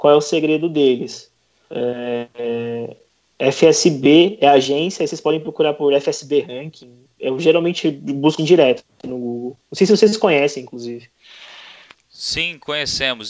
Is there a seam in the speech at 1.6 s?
no; 1 cut; at 8.4 s

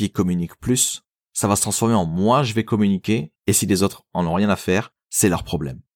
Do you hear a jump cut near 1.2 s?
no; 1 cut; at 3.4 s

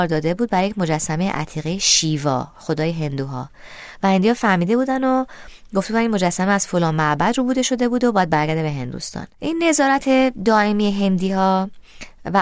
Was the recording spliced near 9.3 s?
yes; 1 cut; at 9.3 s

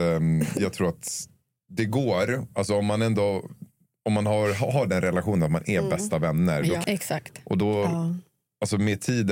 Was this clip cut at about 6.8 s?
yes; 1 cut; at 6.8 s

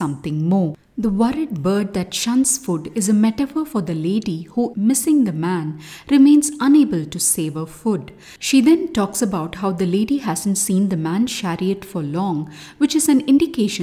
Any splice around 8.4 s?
no; 1 cut; at 4.7 s

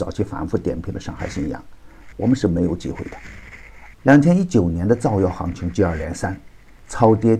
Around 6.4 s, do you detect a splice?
no; 2 cuts; at 2.1 s, 3.9 s

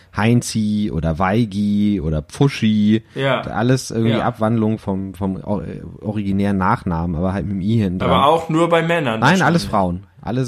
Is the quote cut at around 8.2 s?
no; 1 cut; at 4.8 s

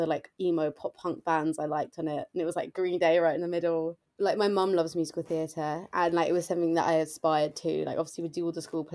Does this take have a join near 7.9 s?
no; 1 cut; at 4.0 s

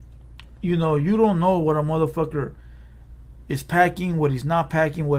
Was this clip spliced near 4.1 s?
no; 0 cuts

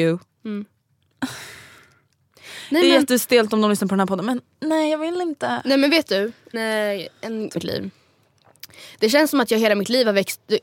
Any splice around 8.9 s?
no; 2 cuts; at 6.5 s, 7.6 s

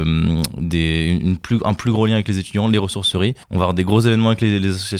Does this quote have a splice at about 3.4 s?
yes; 1 cut; at 3.4 s

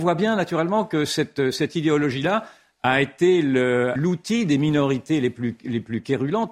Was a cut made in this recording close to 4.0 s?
yes; 1 cut; at 4.0 s

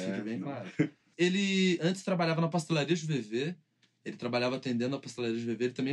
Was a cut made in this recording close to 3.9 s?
no; 1 cut; at 1.1 s

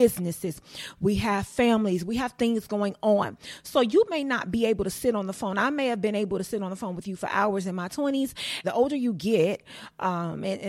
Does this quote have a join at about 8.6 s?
yes; 1 cut; at 8.6 s

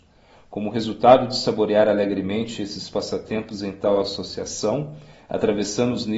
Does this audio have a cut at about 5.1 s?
yes; 1 cut; at 5.1 s

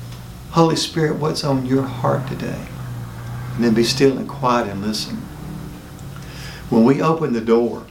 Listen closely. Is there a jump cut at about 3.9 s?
no; 0 cuts

